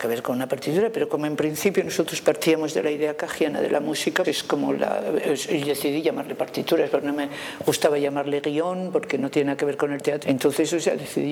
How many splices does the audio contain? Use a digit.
2